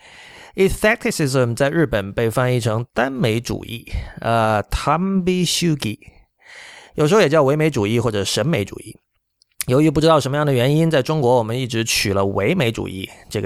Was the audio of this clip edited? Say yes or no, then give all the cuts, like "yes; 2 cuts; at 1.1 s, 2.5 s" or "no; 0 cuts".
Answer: no; 0 cuts